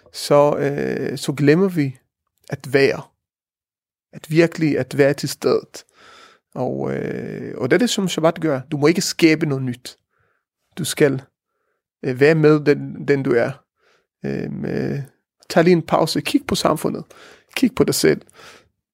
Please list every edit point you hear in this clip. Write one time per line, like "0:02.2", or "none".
none